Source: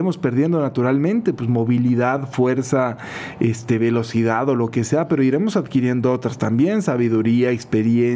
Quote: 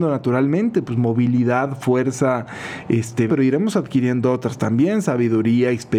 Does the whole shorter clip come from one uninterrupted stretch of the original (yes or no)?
no